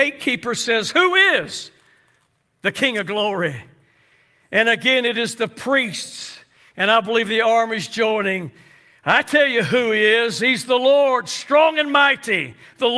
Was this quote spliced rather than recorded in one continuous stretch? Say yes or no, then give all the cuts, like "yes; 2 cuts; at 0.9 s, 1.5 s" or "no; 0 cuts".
no; 0 cuts